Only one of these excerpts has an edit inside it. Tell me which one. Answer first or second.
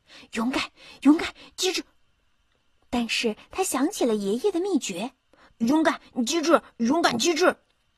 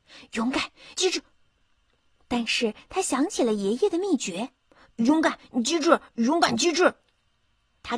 second